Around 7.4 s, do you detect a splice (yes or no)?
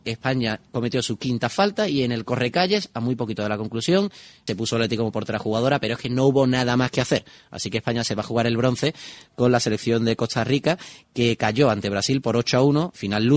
no